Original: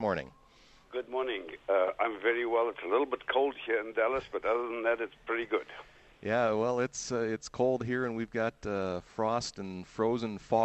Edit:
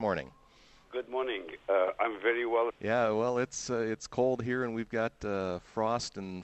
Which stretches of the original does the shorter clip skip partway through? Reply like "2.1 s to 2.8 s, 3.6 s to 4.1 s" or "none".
2.7 s to 6.1 s